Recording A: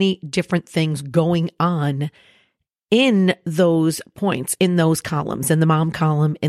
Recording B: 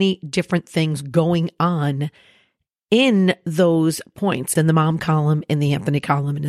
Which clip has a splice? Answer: B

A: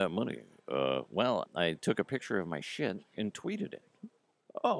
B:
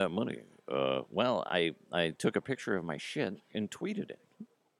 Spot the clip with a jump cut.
A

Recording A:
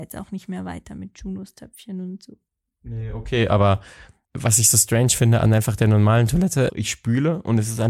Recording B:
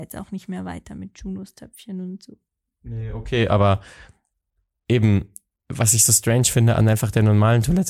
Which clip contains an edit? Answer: A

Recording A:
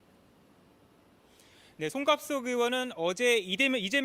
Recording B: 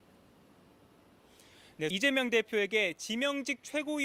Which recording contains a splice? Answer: B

